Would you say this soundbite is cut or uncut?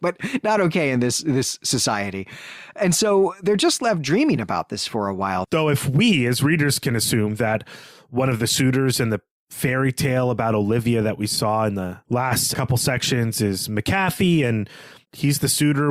cut